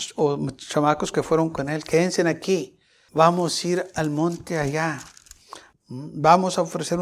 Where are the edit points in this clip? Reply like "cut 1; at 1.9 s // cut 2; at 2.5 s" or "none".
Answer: cut 1; at 3.1 s // cut 2; at 5.7 s